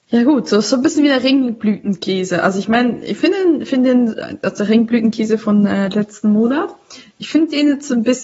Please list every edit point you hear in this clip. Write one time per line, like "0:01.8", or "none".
none